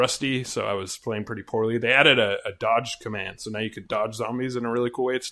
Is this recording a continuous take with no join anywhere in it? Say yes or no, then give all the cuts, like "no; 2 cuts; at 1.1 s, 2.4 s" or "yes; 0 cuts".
yes; 0 cuts